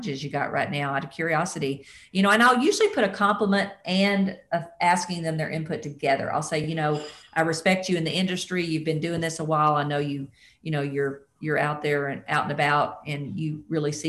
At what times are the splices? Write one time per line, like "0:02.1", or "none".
none